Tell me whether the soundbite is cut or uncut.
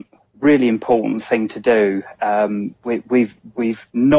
uncut